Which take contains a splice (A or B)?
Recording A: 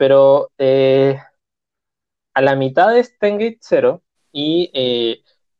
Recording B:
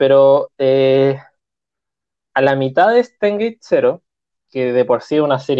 A